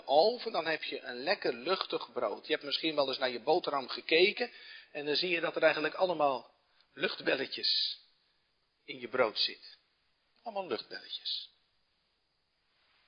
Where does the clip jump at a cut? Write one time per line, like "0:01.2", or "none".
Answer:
none